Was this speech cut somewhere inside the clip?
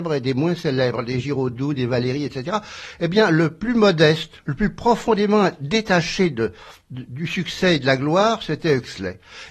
no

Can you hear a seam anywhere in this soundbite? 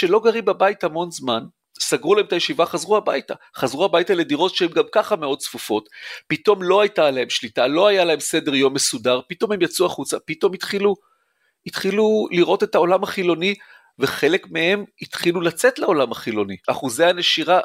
yes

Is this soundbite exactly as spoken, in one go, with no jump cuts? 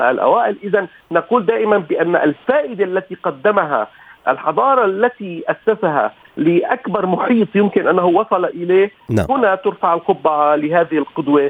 yes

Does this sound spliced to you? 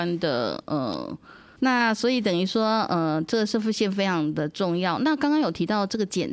yes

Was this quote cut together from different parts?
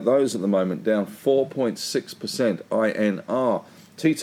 no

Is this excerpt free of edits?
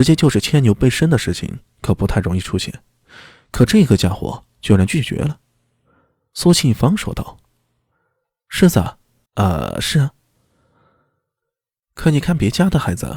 no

